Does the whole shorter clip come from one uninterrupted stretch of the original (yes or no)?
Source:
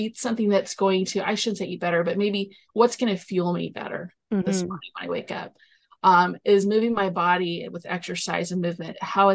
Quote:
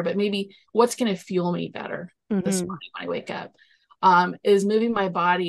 yes